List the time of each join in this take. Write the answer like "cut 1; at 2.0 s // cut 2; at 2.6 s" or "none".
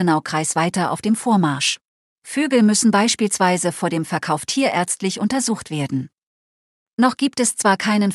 cut 1; at 2.1 s

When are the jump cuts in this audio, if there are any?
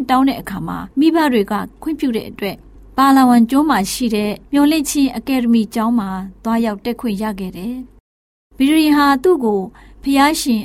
cut 1; at 4.5 s

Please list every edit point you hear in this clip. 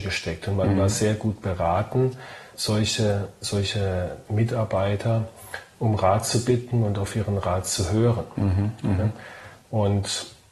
cut 1; at 2.5 s

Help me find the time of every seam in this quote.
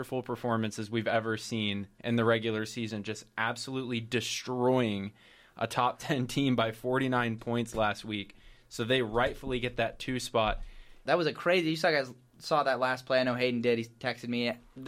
cut 1; at 11.1 s

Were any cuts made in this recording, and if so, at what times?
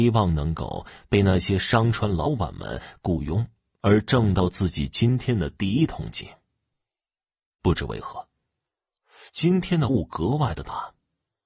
none

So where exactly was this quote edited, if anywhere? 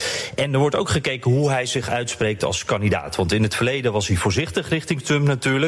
none

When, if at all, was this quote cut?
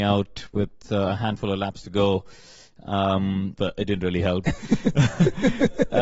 cut 1; at 3.6 s

